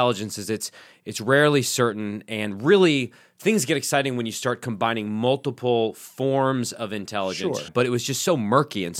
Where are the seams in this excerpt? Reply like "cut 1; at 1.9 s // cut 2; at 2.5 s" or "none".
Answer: cut 1; at 7.7 s